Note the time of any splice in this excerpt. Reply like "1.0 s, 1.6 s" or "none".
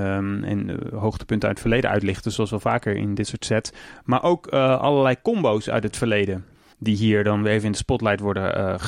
none